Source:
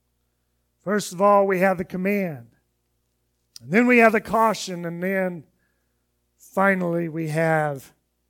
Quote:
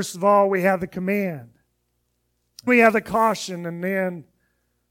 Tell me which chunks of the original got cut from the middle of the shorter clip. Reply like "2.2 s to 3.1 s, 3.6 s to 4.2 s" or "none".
3.6 s to 3.9 s